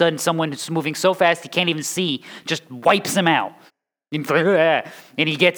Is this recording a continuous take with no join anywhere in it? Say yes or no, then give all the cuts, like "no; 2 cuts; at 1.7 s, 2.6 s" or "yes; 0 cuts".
no; 1 cut; at 3.7 s